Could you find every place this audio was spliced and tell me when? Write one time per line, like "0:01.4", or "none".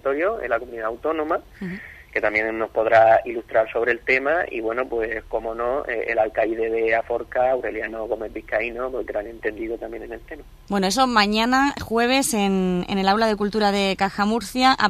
0:10.7